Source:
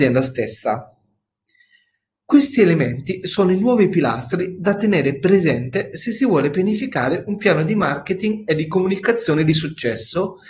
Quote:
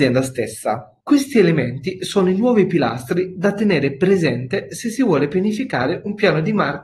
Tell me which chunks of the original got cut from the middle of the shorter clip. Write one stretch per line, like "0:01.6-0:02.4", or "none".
0:01.0-0:02.2